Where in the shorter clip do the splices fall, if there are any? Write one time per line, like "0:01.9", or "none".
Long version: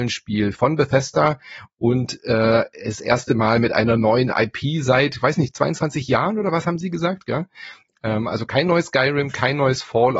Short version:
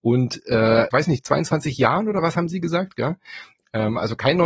0:00.9